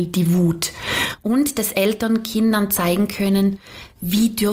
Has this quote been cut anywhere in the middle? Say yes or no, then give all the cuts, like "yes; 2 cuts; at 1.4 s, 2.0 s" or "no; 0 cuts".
no; 0 cuts